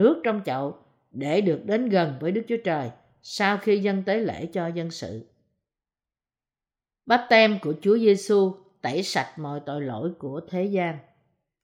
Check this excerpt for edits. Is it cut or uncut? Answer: uncut